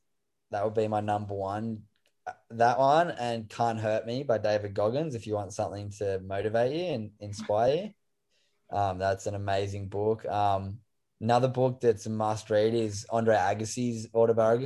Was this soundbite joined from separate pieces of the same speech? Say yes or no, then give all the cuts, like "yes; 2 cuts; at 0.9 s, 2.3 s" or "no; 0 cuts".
no; 0 cuts